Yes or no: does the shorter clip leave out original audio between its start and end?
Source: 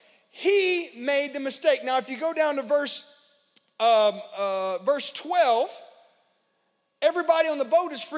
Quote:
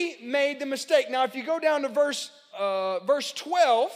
yes